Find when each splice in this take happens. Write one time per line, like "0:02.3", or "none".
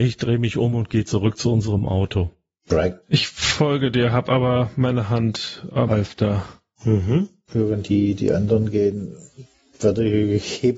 0:05.9

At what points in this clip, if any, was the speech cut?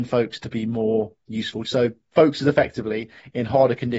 0:01.6

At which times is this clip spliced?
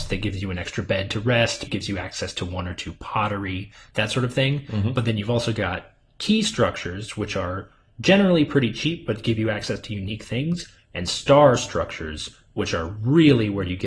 0:01.6

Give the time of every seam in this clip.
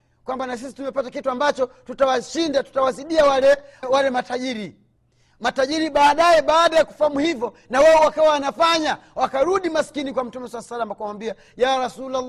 0:03.8

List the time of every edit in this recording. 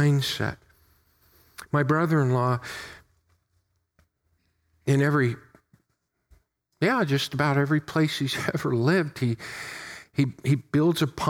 none

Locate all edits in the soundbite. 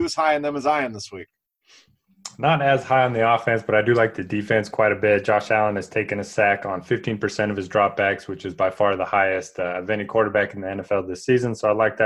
none

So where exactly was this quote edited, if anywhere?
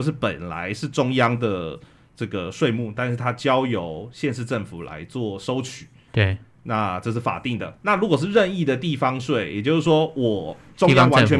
0:07.8

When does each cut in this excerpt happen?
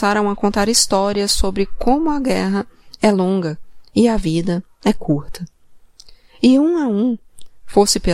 none

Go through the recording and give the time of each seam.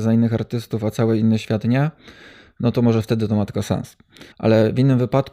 0:04.3

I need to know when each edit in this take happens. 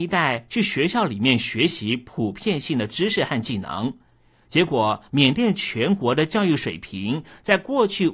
none

